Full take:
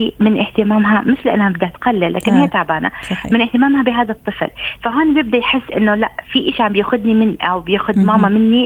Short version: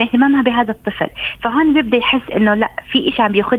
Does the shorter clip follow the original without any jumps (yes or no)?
yes